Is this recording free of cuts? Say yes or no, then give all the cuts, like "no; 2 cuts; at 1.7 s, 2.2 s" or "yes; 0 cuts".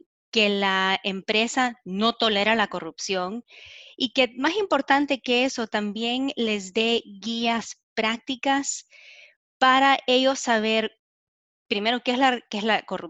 yes; 0 cuts